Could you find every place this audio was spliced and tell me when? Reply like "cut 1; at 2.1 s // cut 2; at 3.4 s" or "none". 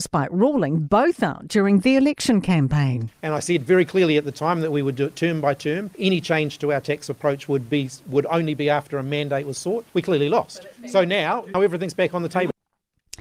cut 1; at 11.5 s